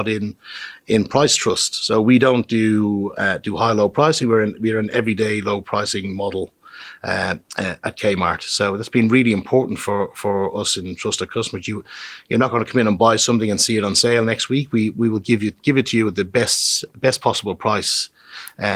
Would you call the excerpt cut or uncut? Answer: uncut